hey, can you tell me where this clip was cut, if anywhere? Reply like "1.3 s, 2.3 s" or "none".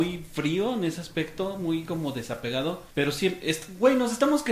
2.9 s